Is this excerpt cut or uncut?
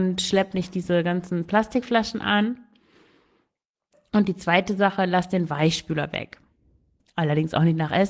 cut